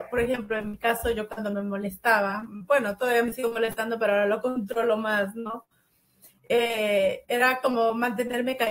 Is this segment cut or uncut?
uncut